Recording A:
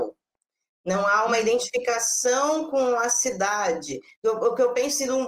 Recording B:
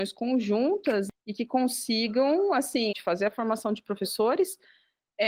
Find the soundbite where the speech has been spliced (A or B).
B